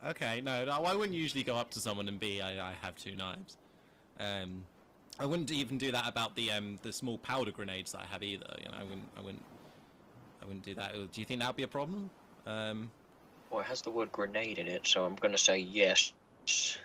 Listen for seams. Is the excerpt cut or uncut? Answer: uncut